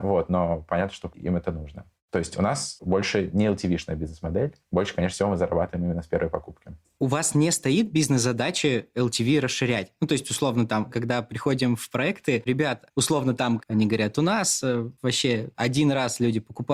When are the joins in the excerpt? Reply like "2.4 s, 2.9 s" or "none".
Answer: 10.9 s, 12.5 s, 13.6 s